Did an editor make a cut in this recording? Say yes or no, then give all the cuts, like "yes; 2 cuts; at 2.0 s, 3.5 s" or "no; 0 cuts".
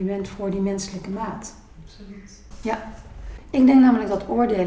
no; 0 cuts